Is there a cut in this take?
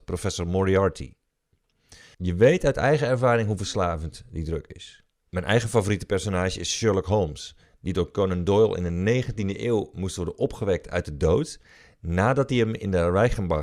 yes; 2 cuts; at 2.1 s, 5.3 s

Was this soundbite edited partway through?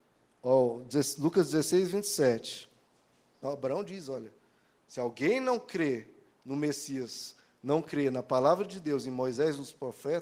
yes; 1 cut; at 3.4 s

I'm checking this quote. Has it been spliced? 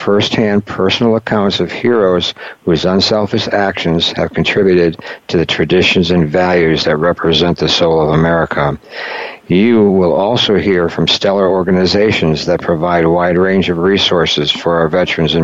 no; 0 cuts

